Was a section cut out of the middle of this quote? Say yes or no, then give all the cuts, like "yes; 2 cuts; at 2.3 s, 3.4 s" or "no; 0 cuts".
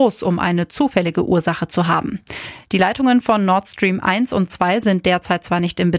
no; 0 cuts